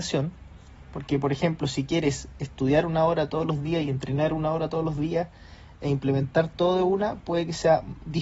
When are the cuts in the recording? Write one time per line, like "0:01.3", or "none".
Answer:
none